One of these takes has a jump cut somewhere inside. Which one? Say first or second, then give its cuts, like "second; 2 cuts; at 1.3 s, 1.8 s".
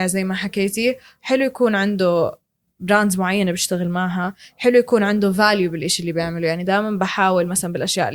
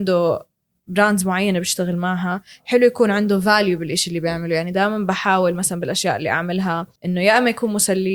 second; 1 cut; at 7.0 s